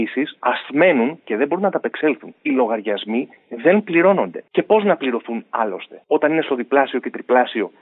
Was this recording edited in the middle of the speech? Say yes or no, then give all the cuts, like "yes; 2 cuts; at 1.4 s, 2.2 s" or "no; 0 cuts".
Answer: no; 0 cuts